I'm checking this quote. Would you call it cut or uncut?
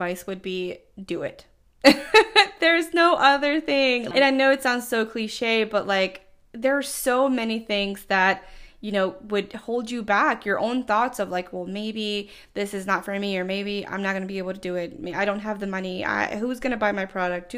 cut